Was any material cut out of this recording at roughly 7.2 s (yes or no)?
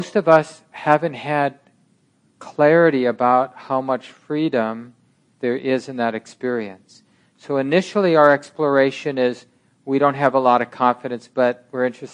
no